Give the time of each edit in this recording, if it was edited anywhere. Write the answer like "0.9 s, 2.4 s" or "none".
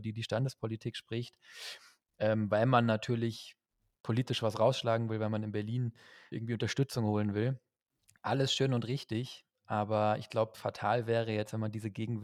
6.3 s